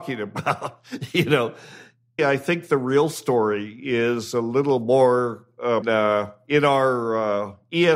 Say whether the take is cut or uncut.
cut